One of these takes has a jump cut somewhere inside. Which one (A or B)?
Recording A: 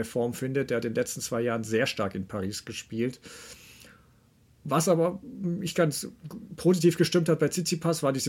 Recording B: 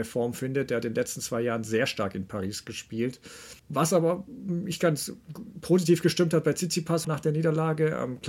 B